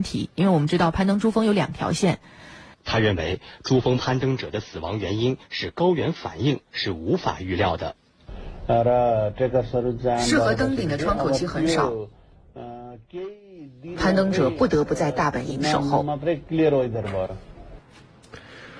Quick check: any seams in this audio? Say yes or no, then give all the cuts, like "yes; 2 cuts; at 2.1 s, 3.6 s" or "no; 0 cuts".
yes; 1 cut; at 2.7 s